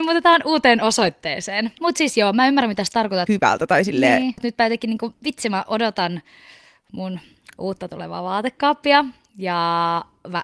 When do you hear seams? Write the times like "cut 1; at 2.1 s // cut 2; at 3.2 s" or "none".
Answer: cut 1; at 1.8 s // cut 2; at 3.3 s // cut 3; at 4.4 s